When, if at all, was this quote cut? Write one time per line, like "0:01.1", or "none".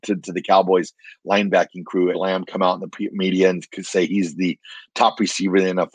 0:02.1